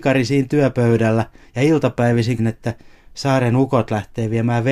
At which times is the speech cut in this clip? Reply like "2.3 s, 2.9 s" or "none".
2.4 s